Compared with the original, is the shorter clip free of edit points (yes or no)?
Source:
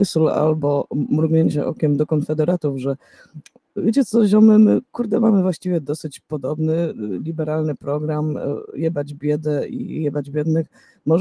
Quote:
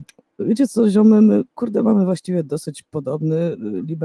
yes